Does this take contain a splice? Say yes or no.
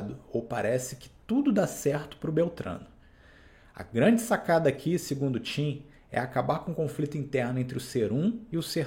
no